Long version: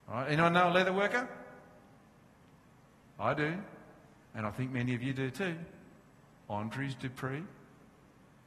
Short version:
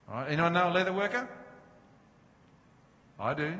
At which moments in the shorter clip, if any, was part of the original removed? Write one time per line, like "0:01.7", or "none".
none